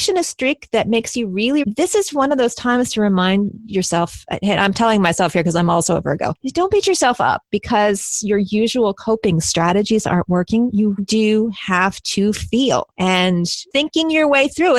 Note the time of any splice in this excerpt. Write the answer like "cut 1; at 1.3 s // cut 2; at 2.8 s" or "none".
cut 1; at 1.6 s // cut 2; at 11.0 s